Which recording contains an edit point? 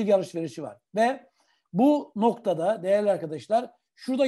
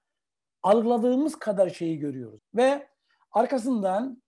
second; 1 cut; at 2.4 s

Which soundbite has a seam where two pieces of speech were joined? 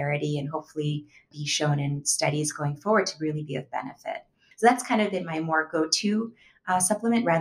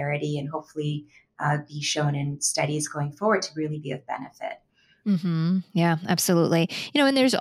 first; 2 cuts; at 1.3 s, 4.5 s

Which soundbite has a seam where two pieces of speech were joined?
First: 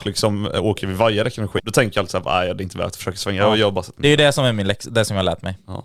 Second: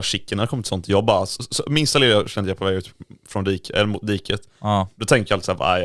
first; 1 cut; at 1.6 s

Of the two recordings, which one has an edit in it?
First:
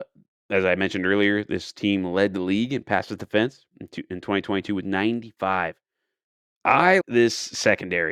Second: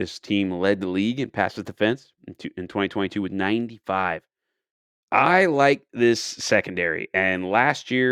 first; 1 cut; at 7.0 s

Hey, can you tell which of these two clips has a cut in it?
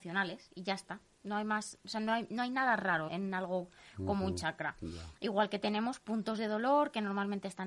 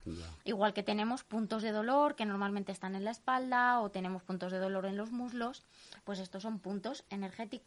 first; 1 cut; at 3.1 s

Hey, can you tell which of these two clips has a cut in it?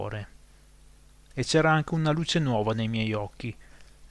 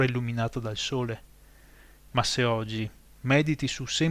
second; 1 cut; at 2.0 s

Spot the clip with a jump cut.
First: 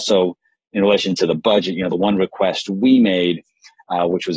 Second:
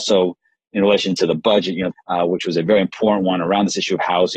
second; 1 cut; at 1.9 s

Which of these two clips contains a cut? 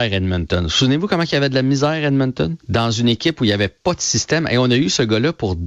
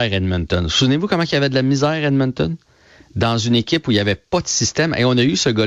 first; 1 cut; at 2.6 s

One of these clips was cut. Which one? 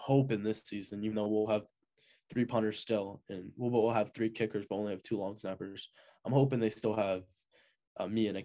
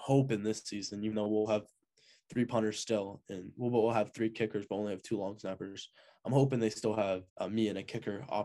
second; 1 cut; at 7.3 s

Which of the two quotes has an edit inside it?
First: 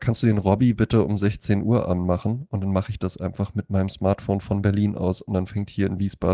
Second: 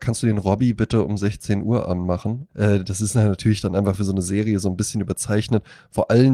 second; 1 cut; at 2.5 s

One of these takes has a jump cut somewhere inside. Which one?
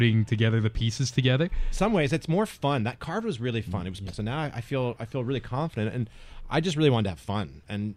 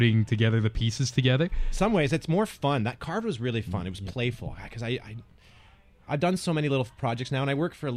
first; 1 cut; at 4.1 s

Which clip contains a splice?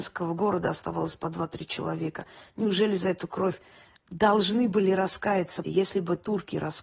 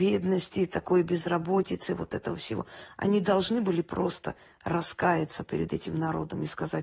first; 1 cut; at 5.6 s

